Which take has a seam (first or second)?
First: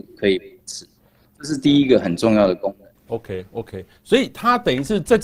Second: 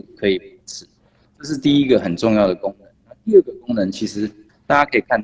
first